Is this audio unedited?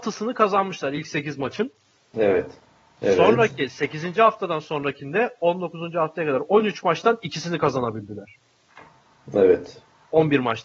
no; 1 cut; at 2.9 s

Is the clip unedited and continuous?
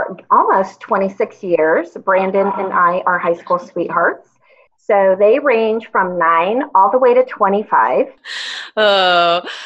no; 2 cuts; at 4.7 s, 8.2 s

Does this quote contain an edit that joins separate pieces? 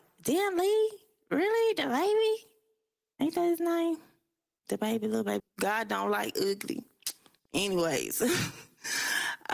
yes; 1 cut; at 5.4 s

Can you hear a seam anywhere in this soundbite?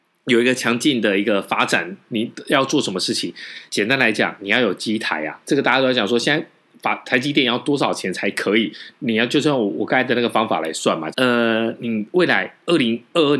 yes; 3 cuts; at 3.7 s, 5.4 s, 11.1 s

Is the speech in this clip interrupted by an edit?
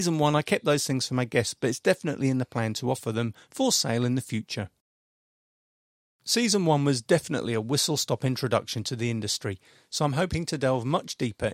no; 0 cuts

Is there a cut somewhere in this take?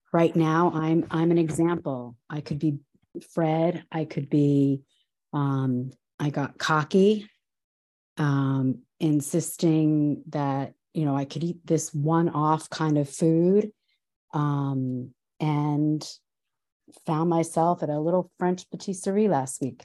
no; 0 cuts

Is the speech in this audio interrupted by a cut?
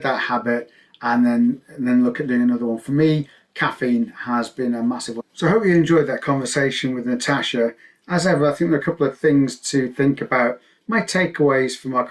yes; 1 cut; at 5.2 s

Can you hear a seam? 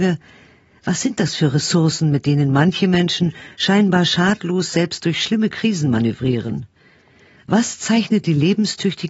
no; 0 cuts

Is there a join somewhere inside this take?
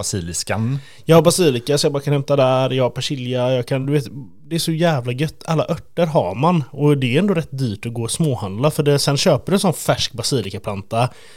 no; 0 cuts

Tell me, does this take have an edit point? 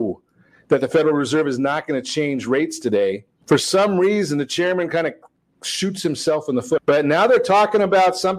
yes; 2 cuts; at 3.4 s, 6.8 s

